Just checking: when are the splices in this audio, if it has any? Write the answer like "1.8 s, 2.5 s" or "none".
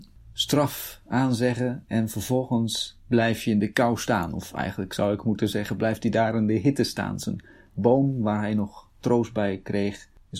none